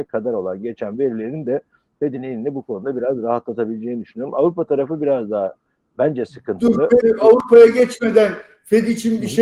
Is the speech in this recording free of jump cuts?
no; 1 cut; at 7.0 s

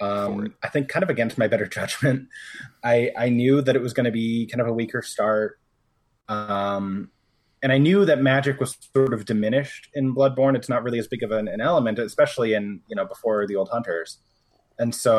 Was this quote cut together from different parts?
no; 0 cuts

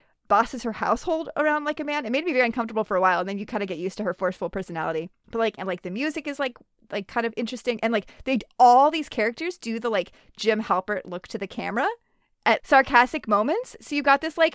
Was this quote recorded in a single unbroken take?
no; 2 cuts; at 5.6 s, 12.6 s

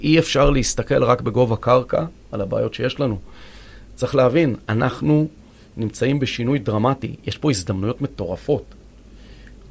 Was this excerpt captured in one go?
yes; 0 cuts

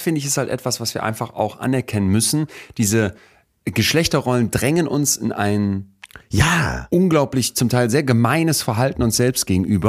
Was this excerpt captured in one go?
yes; 0 cuts

